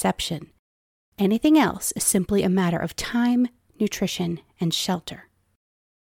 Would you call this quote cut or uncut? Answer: uncut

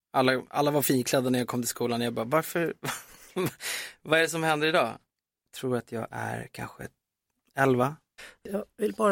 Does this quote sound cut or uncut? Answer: cut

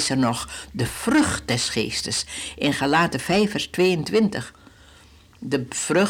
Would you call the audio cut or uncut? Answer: uncut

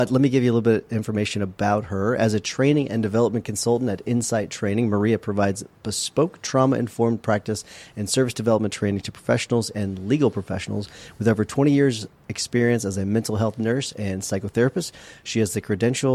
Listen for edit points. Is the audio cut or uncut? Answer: uncut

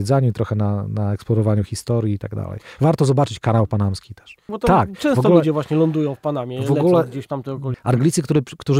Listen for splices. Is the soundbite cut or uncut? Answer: cut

